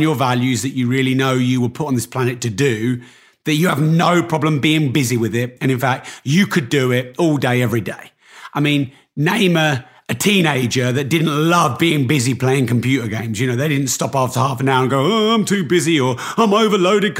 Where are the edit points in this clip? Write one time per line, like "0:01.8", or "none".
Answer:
none